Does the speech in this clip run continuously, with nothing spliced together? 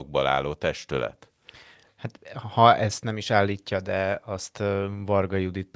yes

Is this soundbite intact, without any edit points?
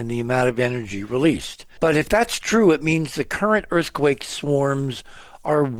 no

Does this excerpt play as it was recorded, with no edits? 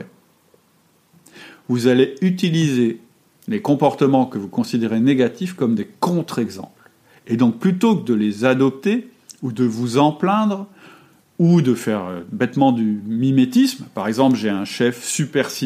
yes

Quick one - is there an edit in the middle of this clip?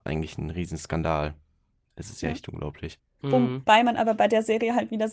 yes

